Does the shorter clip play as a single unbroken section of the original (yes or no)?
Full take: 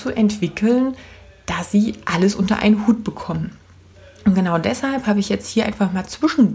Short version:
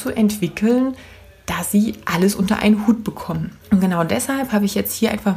no